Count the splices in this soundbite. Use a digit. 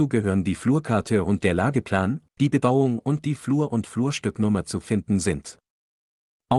1